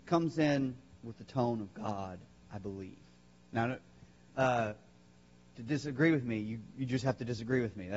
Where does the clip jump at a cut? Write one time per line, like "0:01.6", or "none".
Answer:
0:04.3